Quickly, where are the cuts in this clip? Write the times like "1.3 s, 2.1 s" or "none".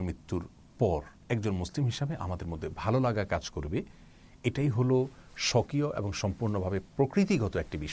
none